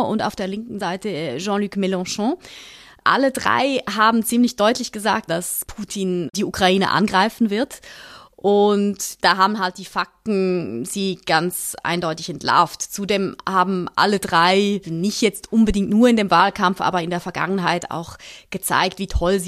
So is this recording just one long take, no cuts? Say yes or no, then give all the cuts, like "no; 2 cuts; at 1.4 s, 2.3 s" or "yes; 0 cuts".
no; 1 cut; at 5.3 s